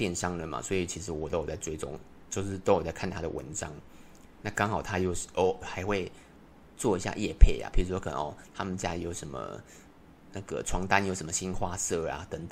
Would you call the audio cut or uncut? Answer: cut